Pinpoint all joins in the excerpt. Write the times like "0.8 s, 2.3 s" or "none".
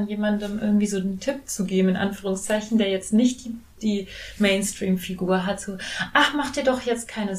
none